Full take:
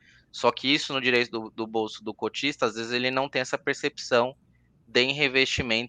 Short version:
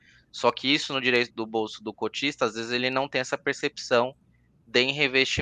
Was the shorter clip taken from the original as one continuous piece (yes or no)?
no